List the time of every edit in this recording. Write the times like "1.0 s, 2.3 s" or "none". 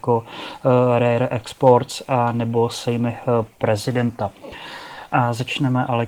5.1 s